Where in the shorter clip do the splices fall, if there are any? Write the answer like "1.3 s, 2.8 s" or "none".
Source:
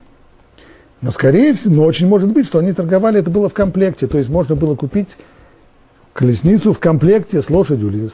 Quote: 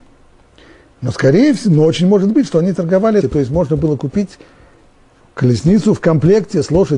3.2 s